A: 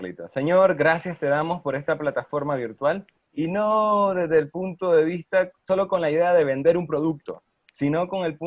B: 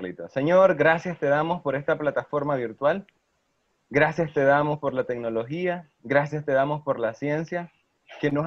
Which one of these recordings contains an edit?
A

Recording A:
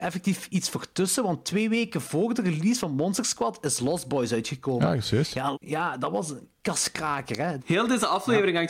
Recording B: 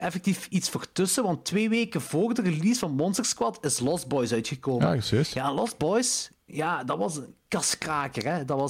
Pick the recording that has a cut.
A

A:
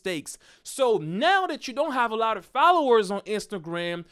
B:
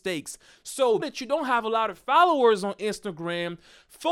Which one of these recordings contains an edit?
B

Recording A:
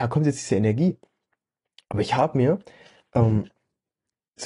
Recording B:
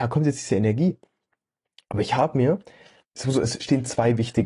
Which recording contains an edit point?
B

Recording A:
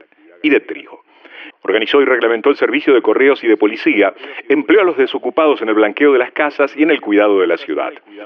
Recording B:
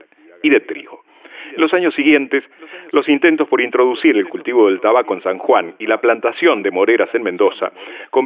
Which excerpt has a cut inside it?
A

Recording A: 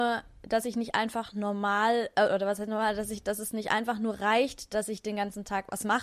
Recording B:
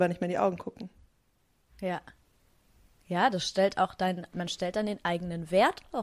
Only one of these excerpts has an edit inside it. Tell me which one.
B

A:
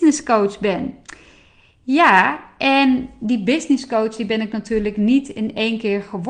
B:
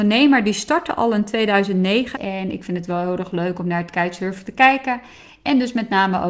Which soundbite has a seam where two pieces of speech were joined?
B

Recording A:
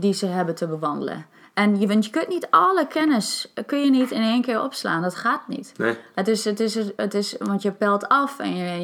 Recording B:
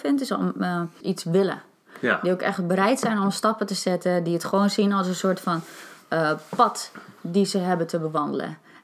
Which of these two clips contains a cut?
B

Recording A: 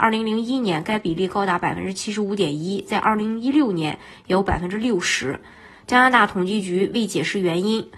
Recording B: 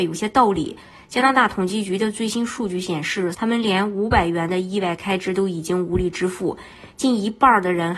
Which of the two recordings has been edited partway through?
B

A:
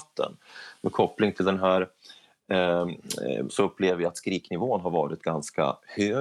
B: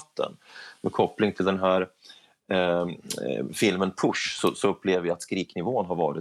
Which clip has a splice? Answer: A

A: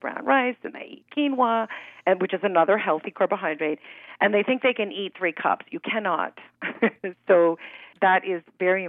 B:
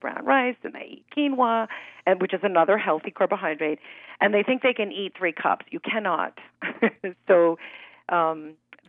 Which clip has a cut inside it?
A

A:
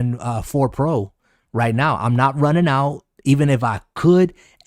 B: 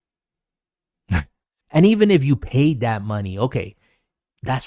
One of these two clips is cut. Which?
B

